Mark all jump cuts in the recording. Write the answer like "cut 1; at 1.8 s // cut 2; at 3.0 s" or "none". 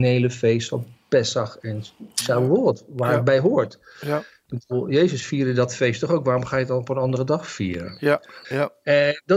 cut 1; at 8.4 s